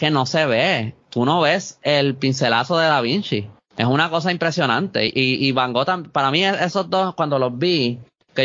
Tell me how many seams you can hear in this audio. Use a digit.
0